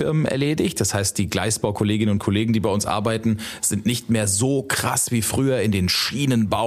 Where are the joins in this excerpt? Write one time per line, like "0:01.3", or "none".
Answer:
none

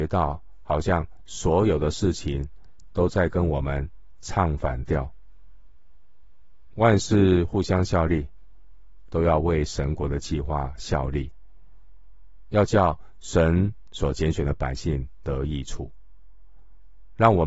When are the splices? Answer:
0:06.7
0:09.1

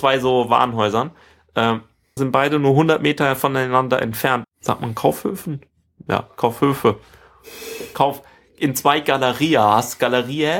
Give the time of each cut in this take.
0:02.2
0:04.4

